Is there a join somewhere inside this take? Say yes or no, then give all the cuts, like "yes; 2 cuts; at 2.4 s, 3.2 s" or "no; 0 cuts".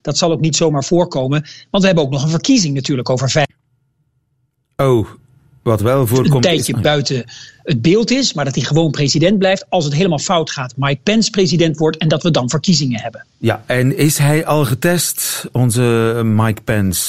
no; 0 cuts